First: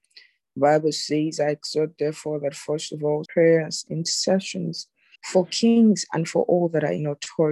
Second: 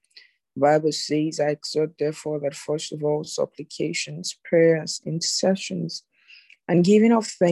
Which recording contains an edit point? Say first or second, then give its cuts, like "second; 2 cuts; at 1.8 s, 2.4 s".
first; 2 cuts; at 3.2 s, 5.1 s